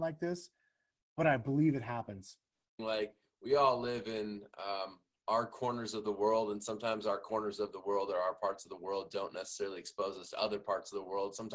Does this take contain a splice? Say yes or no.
yes